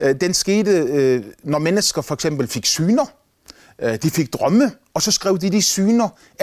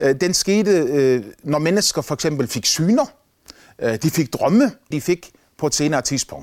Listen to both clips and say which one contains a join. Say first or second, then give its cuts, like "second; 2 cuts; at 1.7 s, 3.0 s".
second; 1 cut; at 4.9 s